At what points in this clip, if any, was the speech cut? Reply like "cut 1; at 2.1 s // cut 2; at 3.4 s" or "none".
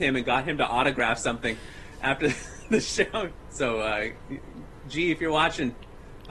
cut 1; at 3.5 s